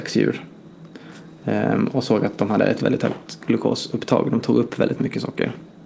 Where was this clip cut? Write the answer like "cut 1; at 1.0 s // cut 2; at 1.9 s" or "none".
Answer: cut 1; at 2.8 s